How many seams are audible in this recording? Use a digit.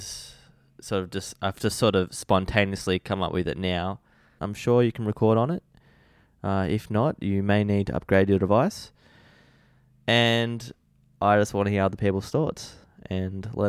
1